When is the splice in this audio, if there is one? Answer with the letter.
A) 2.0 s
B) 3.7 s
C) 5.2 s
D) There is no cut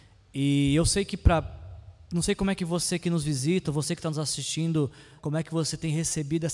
C